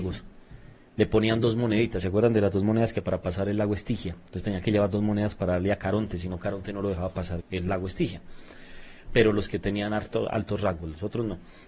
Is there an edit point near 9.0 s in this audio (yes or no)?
yes